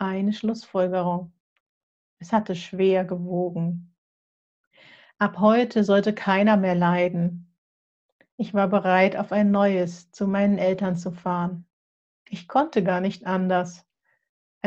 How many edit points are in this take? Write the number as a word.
two